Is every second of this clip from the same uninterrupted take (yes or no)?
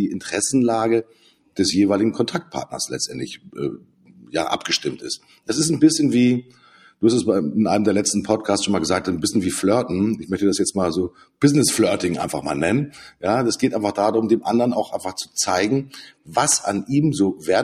yes